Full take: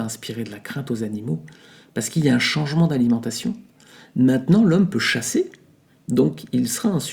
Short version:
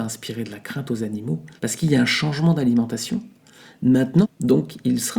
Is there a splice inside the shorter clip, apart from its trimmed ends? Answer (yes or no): yes